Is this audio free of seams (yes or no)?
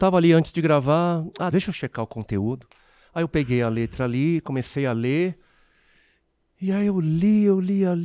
no